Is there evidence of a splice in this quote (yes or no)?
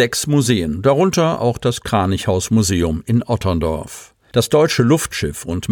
no